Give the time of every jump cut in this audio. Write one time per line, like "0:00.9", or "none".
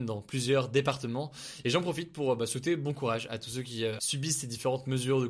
0:01.6
0:04.0